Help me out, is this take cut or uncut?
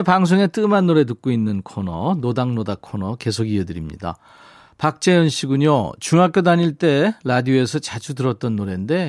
uncut